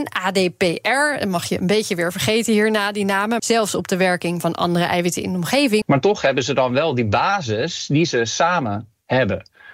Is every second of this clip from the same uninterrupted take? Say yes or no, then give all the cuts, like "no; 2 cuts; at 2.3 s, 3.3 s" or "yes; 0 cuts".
no; 2 cuts; at 3.4 s, 5.8 s